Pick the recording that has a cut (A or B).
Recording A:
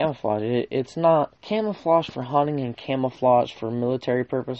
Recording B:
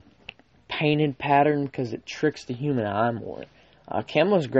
A